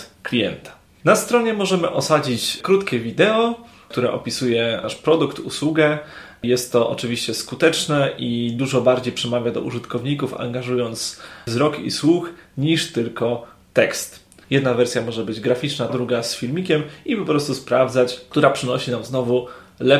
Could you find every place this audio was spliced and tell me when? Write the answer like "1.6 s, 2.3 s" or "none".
14.4 s, 15.9 s